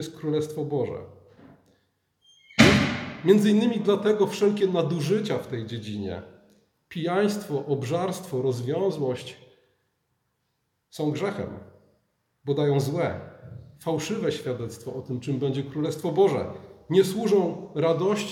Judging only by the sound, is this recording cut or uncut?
uncut